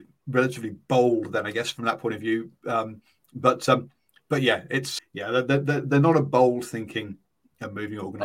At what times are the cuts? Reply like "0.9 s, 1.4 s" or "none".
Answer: 5.0 s